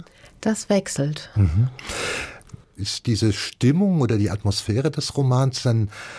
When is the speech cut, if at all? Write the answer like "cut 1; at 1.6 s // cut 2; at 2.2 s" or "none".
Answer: cut 1; at 1.3 s // cut 2; at 2.8 s